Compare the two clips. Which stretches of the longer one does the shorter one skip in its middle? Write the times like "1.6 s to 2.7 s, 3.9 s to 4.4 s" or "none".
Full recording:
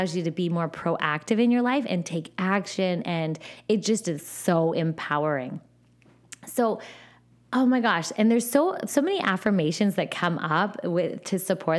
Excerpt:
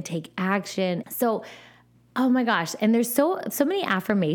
3.0 s to 6.4 s